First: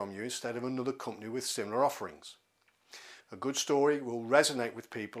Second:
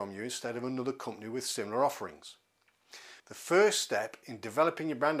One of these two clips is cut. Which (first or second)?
second